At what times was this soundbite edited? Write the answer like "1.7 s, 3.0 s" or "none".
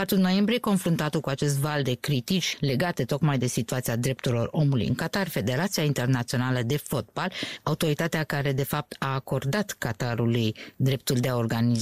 none